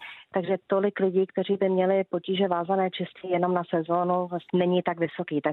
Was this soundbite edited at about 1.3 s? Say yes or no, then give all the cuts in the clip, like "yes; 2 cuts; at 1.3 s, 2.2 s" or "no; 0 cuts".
no; 1 cut; at 4.5 s